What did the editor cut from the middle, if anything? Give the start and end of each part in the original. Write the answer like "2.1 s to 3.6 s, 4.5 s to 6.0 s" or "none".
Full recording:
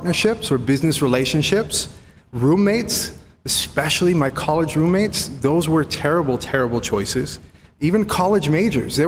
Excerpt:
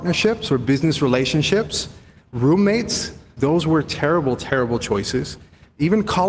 3.4 s to 5.4 s